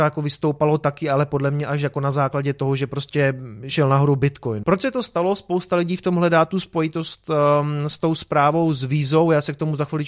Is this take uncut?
no; 1 cut; at 4.6 s

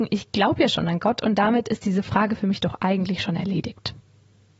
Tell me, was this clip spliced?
no; 0 cuts

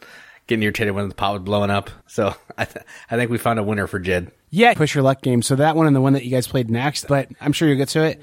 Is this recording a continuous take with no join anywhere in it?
no; 3 cuts; at 2.0 s, 4.7 s, 7.1 s

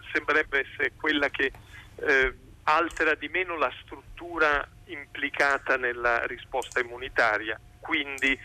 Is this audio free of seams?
yes; 0 cuts

